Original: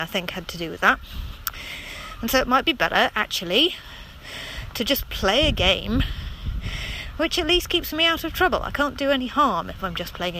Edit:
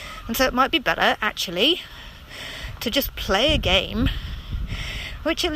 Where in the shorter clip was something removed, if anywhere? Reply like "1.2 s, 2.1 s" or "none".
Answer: none